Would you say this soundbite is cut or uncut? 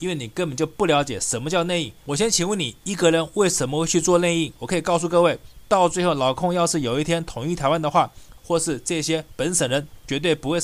cut